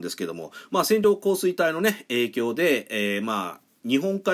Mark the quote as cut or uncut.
uncut